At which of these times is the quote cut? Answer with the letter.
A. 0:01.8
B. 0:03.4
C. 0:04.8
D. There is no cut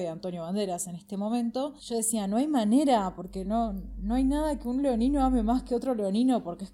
A